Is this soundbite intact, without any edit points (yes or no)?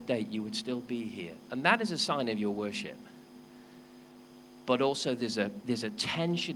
yes